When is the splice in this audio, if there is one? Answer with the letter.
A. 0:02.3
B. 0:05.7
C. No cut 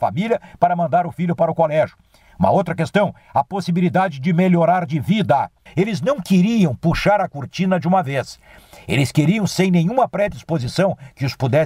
B